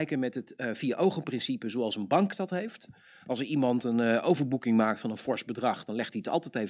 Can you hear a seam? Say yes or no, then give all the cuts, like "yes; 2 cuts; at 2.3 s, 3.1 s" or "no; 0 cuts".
no; 0 cuts